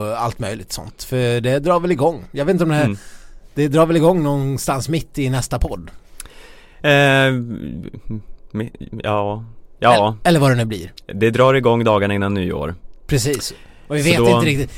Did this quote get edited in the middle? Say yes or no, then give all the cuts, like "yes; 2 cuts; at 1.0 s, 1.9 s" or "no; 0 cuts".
no; 0 cuts